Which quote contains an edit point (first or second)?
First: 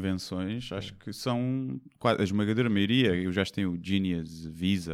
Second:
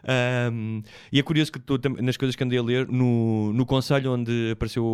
second